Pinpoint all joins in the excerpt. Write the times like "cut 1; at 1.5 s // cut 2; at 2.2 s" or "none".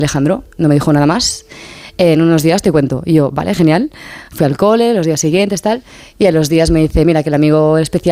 none